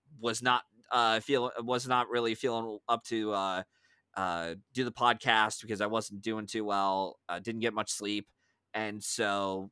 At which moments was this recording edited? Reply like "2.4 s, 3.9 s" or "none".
none